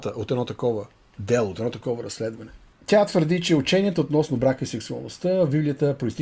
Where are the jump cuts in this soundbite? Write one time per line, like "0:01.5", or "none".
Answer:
none